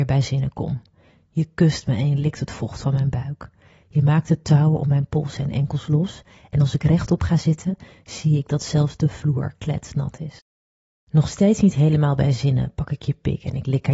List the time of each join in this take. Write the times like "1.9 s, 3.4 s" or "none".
none